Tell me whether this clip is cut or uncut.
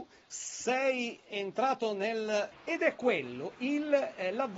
cut